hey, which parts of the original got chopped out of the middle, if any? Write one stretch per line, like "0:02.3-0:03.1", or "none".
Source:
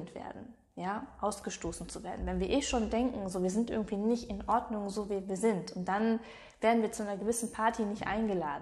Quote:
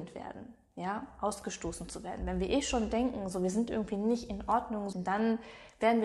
0:04.9-0:05.7